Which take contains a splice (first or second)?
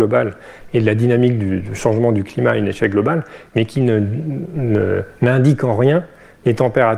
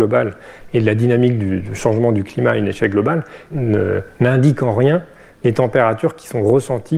second